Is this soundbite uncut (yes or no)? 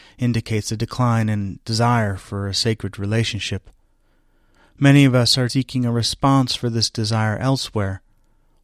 no